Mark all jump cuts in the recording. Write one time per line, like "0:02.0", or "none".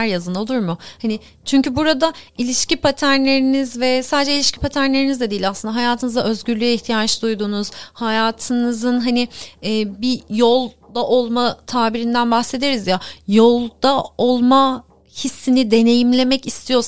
none